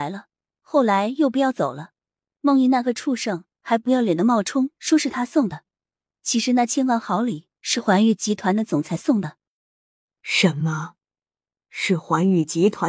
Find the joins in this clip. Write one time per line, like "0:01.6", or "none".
none